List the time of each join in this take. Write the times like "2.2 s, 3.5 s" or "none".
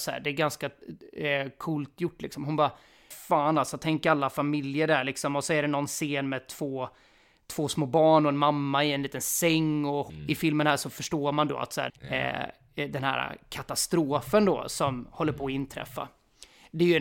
11.9 s